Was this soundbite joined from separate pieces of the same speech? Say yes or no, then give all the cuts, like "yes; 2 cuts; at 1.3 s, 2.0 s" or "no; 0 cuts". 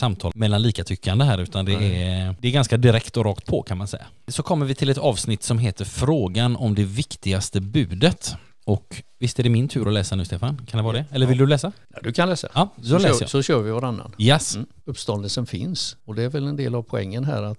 yes; 1 cut; at 14.8 s